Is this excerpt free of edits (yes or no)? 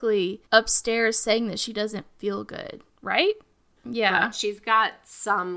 no